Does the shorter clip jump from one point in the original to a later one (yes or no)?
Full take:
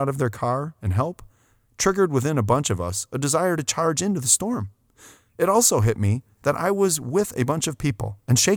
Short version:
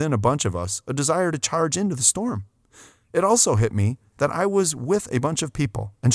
no